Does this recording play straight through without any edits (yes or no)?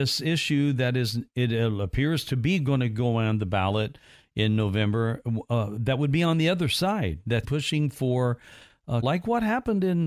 no